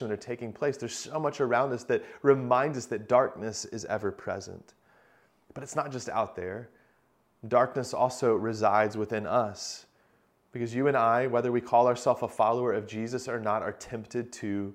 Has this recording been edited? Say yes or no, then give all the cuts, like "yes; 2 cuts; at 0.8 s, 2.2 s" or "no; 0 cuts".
no; 0 cuts